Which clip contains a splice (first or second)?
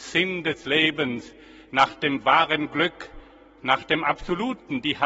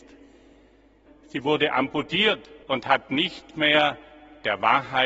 second